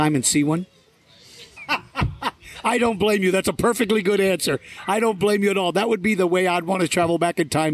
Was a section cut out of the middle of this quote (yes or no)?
yes